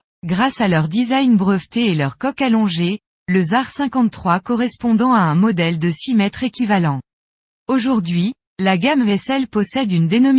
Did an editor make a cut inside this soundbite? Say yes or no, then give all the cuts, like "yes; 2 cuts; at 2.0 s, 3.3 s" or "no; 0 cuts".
yes; 1 cut; at 3.1 s